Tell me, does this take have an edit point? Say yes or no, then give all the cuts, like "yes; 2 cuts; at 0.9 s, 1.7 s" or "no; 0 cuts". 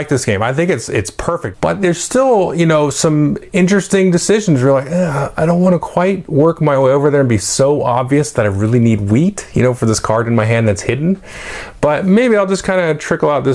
yes; 1 cut; at 1.5 s